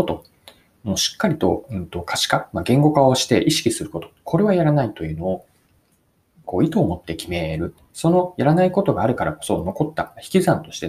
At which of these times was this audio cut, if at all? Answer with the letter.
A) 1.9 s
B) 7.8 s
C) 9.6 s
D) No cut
D